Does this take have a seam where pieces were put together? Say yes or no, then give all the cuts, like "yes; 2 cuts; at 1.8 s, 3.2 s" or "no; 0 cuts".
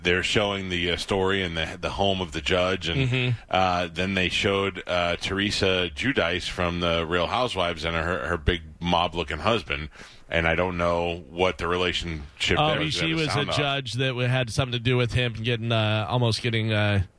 yes; 1 cut; at 12.8 s